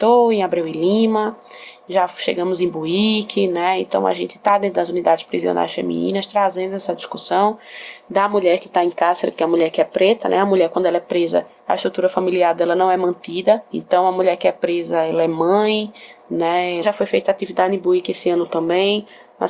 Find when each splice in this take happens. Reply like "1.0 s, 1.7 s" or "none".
13.7 s, 16.8 s